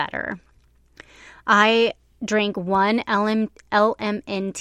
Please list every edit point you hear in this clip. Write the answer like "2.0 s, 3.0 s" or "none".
none